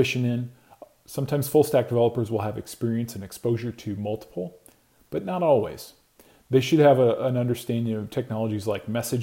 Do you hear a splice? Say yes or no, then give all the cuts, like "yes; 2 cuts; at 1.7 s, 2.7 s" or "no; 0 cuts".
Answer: no; 0 cuts